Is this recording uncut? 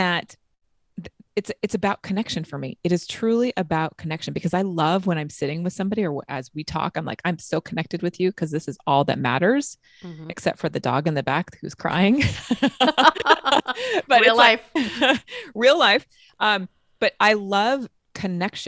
yes; 0 cuts

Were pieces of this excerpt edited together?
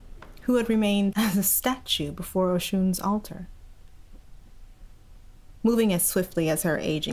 yes; 2 cuts; at 1.1 s, 5.6 s

